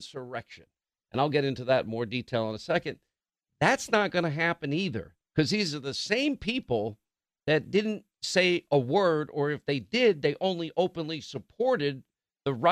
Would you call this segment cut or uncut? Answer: uncut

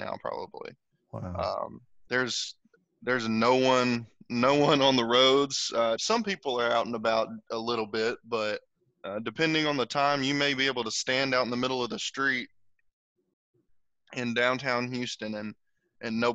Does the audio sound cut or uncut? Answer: cut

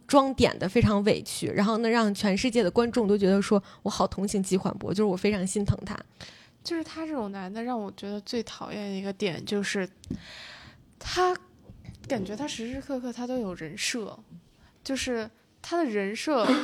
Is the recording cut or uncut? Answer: uncut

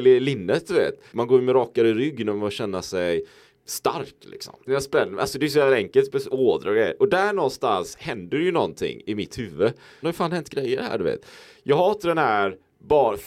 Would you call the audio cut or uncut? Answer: cut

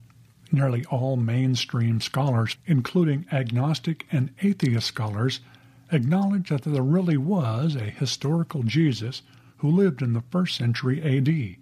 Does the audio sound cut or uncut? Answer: cut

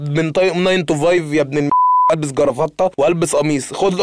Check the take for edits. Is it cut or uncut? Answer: uncut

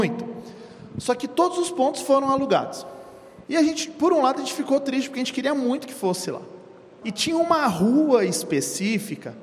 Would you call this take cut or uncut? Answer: cut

